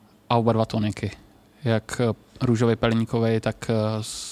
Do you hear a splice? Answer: no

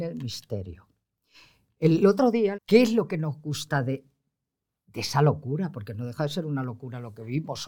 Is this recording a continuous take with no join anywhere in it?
no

